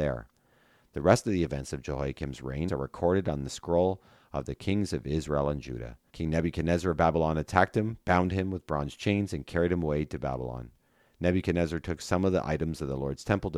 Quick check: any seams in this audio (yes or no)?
yes